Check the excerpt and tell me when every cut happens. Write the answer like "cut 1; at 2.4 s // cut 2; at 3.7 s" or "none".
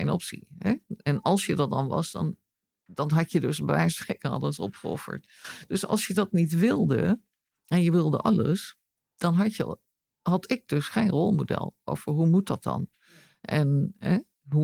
none